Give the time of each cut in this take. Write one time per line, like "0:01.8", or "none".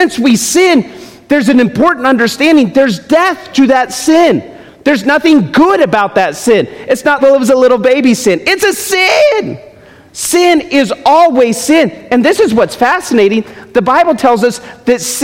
0:07.2